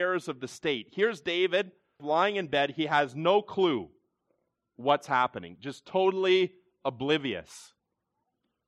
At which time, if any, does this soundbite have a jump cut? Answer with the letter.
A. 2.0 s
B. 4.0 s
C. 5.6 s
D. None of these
A